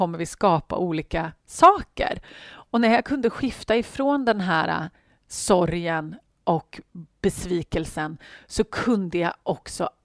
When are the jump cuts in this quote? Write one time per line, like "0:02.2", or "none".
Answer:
none